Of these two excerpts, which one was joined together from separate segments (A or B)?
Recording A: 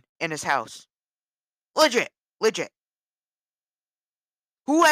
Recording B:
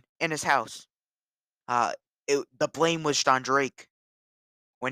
B